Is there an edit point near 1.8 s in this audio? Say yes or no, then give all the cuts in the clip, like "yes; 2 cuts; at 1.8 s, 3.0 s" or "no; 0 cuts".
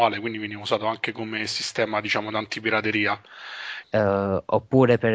no; 1 cut; at 3.8 s